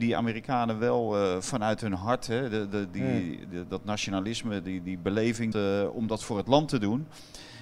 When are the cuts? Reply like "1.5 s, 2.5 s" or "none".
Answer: 5.5 s